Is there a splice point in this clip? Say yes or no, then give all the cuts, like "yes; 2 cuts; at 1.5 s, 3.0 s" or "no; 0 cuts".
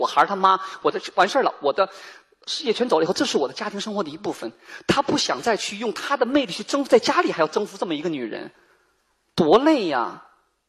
no; 0 cuts